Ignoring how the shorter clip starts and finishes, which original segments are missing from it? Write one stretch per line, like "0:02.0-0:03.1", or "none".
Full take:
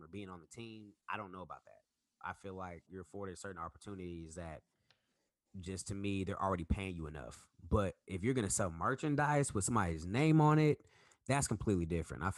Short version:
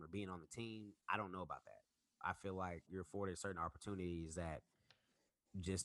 none